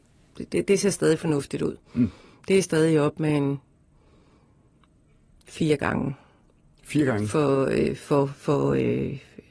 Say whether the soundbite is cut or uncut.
uncut